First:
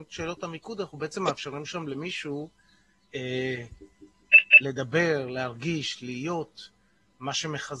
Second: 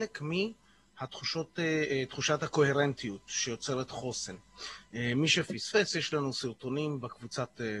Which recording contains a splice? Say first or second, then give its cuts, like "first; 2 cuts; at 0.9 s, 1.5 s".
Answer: first; 1 cut; at 3.1 s